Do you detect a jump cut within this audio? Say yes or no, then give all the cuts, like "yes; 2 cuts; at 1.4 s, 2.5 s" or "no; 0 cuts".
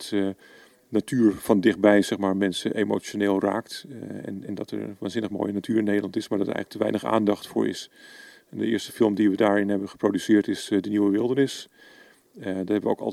no; 0 cuts